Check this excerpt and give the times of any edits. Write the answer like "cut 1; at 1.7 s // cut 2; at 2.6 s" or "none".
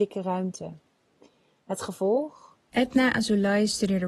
cut 1; at 2.7 s